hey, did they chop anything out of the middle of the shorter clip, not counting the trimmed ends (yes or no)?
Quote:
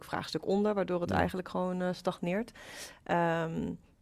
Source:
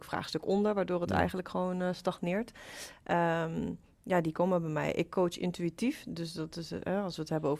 no